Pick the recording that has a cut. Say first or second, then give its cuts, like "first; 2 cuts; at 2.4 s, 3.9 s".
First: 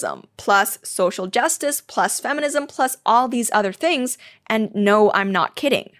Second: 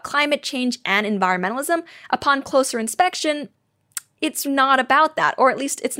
second; 1 cut; at 4.4 s